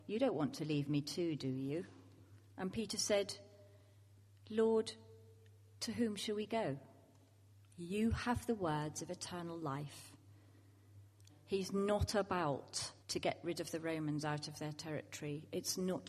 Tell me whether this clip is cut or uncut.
cut